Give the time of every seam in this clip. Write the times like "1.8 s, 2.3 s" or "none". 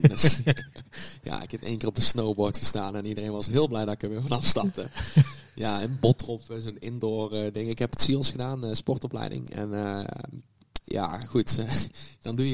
none